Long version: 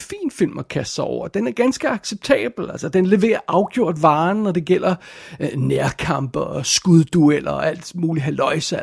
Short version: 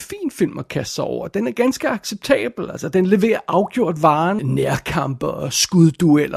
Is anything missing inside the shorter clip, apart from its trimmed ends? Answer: yes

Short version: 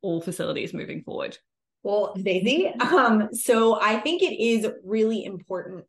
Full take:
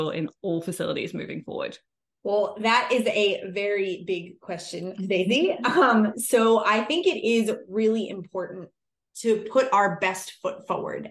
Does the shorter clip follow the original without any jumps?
no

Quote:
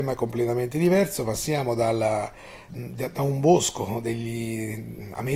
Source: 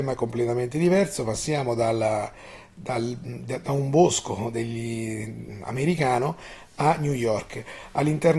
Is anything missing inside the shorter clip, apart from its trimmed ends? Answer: yes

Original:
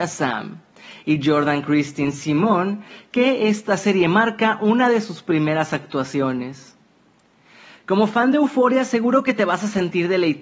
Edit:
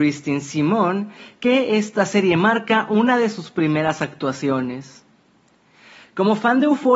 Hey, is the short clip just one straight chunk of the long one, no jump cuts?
yes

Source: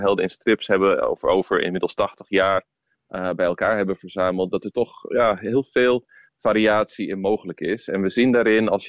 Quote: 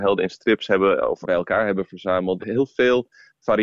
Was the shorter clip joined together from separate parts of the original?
yes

